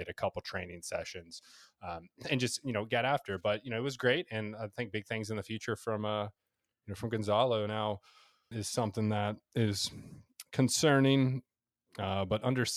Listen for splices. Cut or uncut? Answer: cut